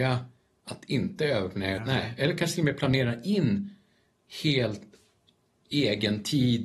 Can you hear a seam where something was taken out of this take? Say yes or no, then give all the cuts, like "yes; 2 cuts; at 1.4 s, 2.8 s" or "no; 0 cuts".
yes; 1 cut; at 1.8 s